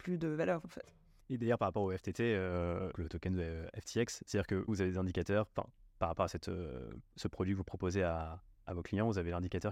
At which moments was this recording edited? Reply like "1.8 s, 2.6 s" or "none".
1.2 s, 2.9 s, 4.7 s